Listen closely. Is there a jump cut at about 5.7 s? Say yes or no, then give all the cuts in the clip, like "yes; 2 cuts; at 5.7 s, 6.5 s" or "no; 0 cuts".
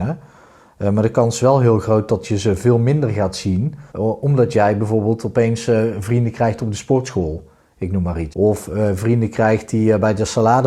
no; 2 cuts; at 3.9 s, 8.3 s